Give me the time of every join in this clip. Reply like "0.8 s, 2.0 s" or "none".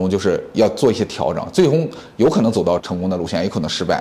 2.8 s